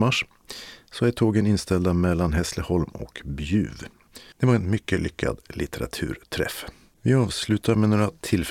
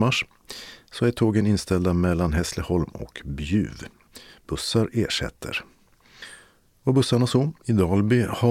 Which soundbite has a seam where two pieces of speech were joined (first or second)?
first